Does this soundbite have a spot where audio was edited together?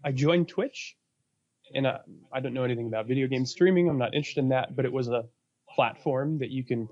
no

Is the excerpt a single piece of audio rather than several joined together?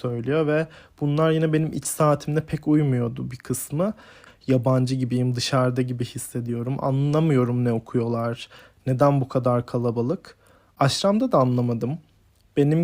no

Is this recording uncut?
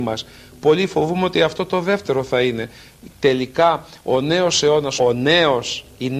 no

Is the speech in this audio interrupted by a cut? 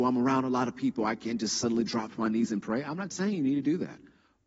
no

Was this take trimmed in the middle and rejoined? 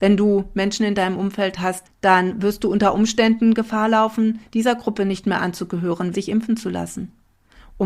yes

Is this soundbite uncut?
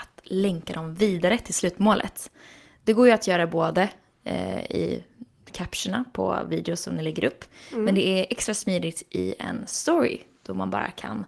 yes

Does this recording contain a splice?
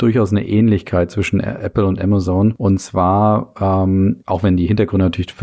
yes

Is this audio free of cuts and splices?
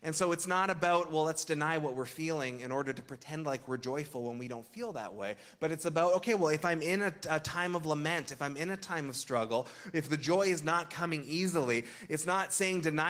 yes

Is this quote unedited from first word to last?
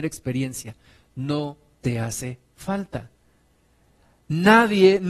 yes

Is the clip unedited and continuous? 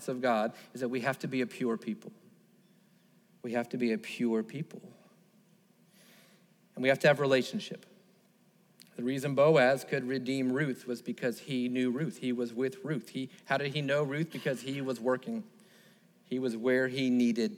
no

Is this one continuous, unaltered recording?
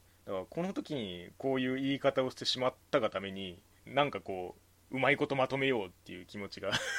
no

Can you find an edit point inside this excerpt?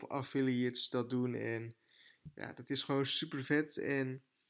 no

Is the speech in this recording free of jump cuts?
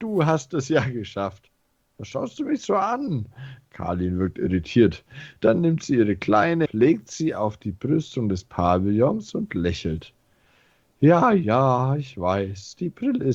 no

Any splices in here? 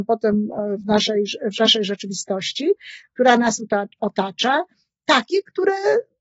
no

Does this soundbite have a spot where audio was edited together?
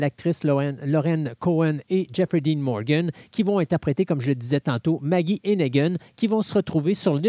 no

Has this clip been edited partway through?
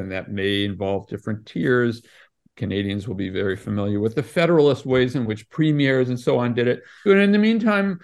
yes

